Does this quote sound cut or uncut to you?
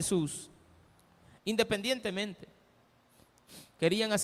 cut